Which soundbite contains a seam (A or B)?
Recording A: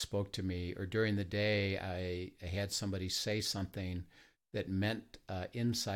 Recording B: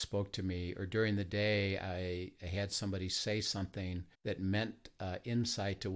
B